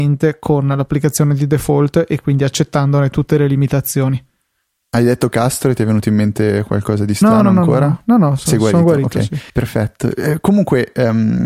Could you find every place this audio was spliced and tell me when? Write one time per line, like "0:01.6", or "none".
0:09.5